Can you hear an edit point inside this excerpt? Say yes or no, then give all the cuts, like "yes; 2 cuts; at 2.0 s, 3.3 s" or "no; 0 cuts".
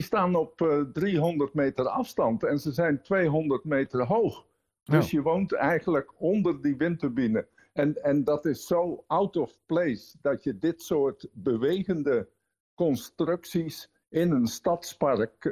no; 0 cuts